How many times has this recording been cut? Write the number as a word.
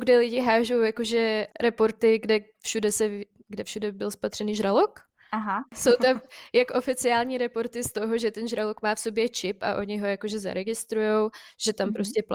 one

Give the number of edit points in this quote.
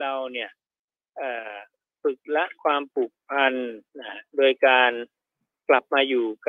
one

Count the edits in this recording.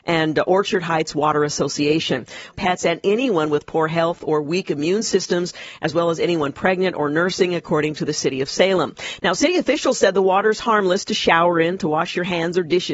one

